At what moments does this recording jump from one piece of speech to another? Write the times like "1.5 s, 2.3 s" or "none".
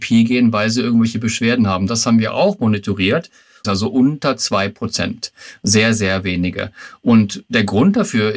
3.6 s